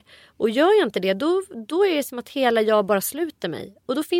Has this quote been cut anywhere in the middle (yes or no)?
no